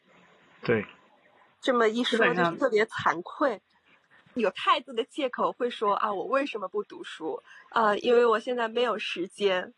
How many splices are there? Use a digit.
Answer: 1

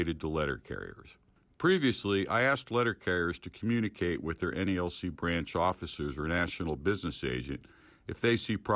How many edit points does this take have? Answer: 0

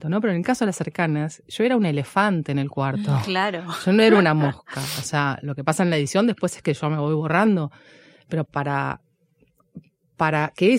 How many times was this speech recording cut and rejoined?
1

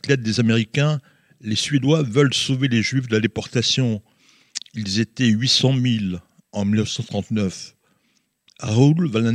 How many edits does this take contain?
0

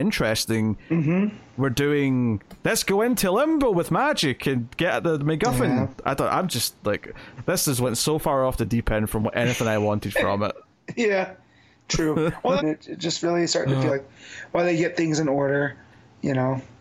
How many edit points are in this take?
2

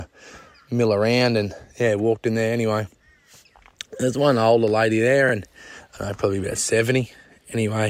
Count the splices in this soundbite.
0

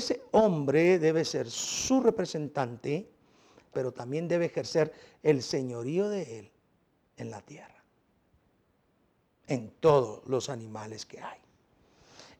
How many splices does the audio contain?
1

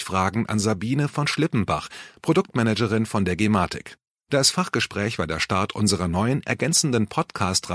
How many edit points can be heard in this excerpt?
0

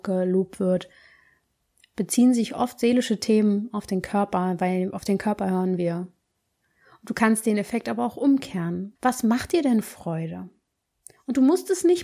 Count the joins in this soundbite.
1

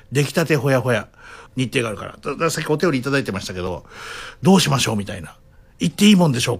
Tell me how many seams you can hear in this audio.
1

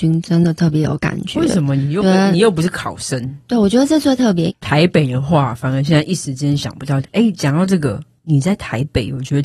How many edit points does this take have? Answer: 2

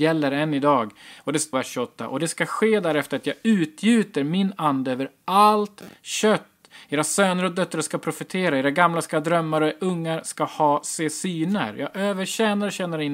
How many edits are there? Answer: 1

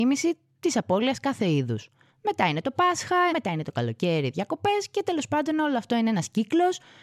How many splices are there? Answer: 2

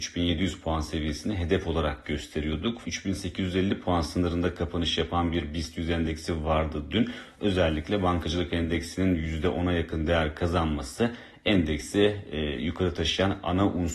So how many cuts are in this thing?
1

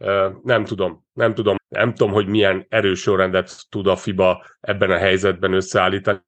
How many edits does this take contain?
1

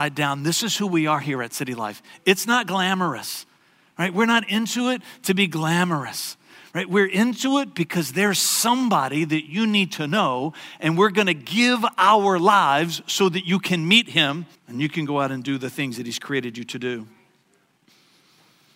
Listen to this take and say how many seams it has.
2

